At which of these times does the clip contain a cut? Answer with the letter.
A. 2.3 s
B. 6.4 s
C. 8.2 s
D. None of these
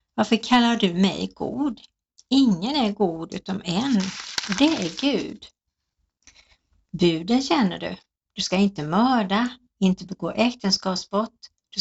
D